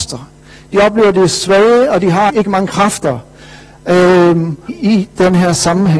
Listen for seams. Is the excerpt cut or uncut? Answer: cut